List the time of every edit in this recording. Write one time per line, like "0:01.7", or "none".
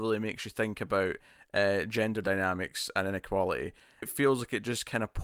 0:04.0